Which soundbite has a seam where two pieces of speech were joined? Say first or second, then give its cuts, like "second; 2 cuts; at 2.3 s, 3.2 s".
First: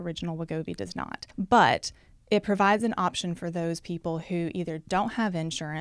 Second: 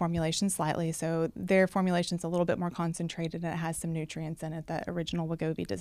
first; 1 cut; at 1.3 s